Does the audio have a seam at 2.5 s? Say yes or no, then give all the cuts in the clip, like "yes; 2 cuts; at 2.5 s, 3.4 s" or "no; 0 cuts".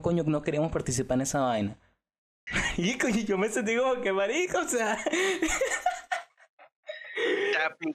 yes; 1 cut; at 2.5 s